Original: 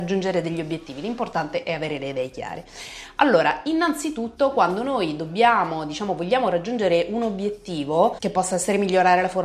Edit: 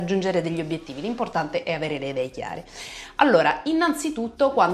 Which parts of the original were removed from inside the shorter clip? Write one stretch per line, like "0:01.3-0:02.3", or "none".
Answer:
none